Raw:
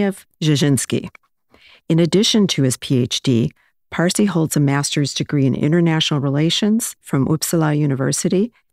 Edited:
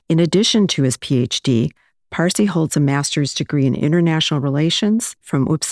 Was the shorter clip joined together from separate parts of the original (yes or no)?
no